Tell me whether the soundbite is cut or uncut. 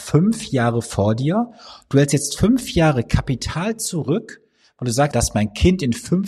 cut